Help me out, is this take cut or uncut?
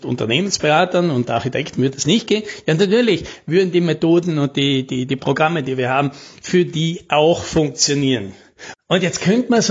cut